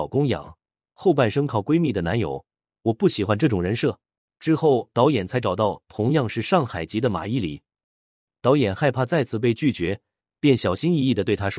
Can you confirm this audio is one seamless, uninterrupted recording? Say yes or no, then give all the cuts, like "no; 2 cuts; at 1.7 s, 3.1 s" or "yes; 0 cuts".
no; 2 cuts; at 4.3 s, 8.3 s